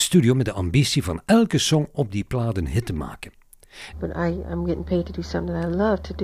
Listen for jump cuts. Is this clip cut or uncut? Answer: cut